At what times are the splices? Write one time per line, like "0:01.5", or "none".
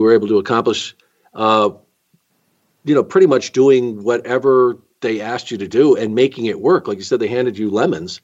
none